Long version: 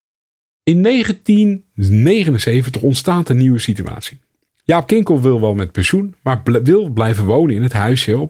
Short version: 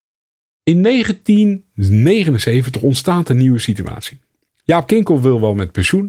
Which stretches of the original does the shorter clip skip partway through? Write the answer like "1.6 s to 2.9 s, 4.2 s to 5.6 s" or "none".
none